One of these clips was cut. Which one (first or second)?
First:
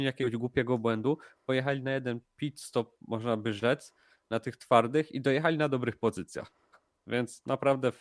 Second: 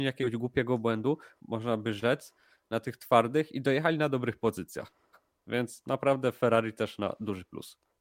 second